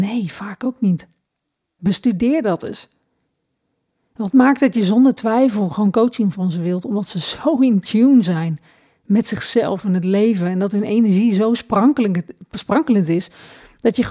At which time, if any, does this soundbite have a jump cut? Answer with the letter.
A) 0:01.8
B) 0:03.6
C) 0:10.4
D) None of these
A